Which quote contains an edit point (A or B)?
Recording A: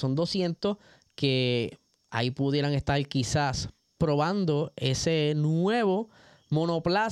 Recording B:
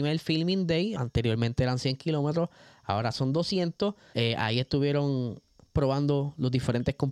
B